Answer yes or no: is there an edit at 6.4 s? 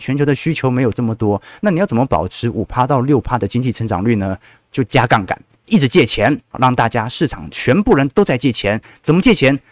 no